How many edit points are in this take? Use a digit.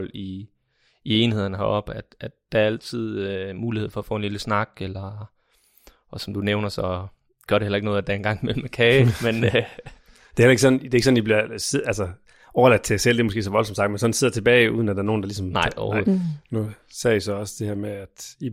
1